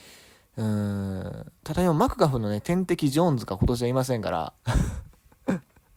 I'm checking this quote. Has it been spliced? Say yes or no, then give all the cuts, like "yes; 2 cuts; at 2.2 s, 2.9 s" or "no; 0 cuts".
yes; 1 cut; at 1.6 s